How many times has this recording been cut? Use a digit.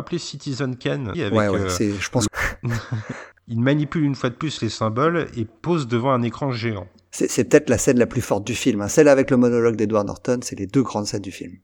2